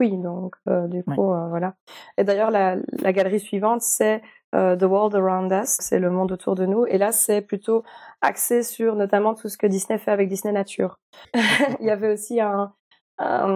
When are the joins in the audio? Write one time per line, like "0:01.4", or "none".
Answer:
0:05.8
0:11.2